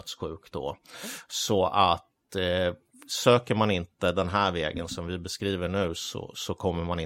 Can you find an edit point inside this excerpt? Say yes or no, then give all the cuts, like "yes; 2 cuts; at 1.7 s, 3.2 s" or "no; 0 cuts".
no; 0 cuts